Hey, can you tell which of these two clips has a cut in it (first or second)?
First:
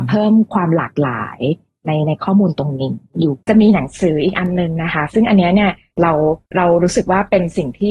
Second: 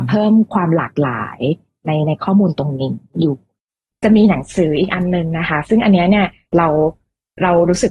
first